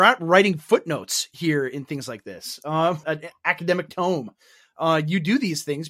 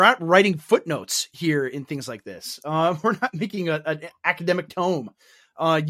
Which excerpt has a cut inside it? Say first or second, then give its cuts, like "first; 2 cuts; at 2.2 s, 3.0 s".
first; 1 cut; at 3.0 s